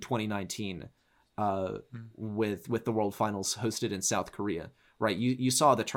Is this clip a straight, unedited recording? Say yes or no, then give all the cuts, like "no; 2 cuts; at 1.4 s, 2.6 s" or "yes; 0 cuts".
yes; 0 cuts